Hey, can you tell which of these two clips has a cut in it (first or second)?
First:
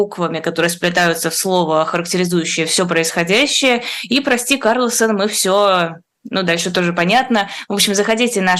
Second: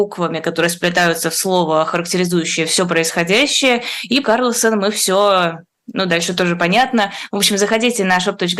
second